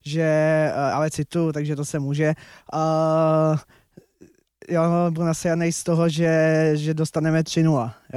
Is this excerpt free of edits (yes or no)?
yes